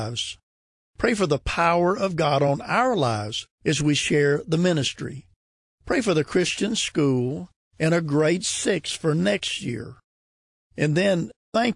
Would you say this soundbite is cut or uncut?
uncut